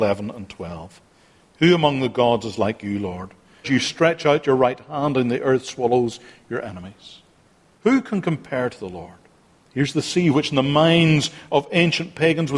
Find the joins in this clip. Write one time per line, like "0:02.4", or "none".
0:03.6
0:09.6